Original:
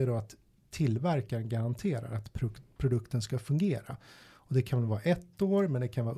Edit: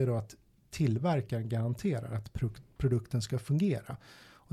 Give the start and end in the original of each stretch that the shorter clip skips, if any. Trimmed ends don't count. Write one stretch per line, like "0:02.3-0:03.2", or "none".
none